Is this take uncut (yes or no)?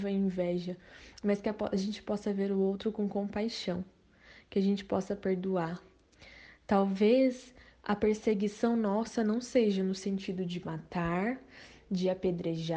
yes